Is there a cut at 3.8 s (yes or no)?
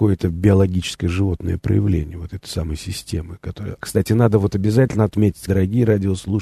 yes